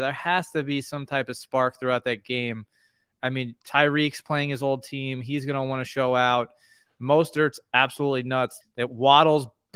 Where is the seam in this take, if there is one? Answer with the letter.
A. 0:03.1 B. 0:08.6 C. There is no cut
B